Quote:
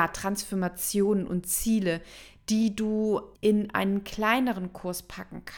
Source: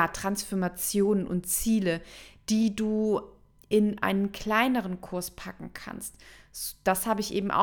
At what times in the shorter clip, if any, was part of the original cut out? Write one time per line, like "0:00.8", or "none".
0:03.3